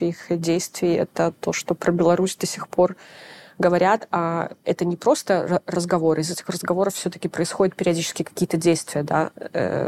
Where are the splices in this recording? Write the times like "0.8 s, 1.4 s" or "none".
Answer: none